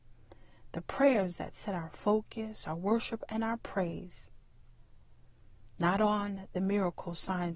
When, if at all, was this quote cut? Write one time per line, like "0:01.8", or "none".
none